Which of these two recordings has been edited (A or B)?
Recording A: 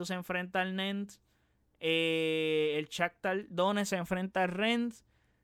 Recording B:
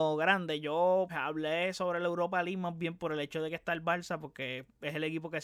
B